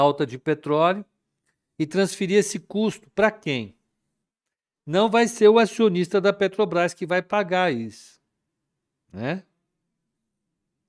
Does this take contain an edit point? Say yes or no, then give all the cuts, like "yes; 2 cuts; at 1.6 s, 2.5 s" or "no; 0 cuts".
no; 0 cuts